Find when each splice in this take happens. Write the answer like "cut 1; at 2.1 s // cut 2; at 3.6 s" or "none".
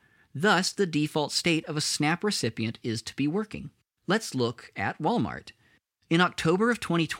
cut 1; at 4.0 s